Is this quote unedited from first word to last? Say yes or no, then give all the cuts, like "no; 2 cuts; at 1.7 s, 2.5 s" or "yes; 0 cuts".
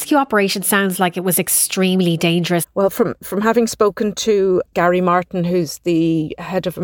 no; 1 cut; at 2.6 s